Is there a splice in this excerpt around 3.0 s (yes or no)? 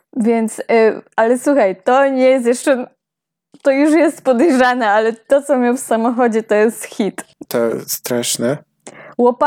no